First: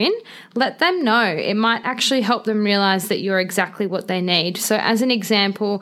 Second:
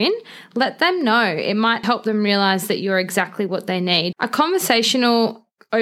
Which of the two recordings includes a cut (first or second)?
second